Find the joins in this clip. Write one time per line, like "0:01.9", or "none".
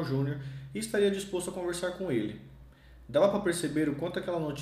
none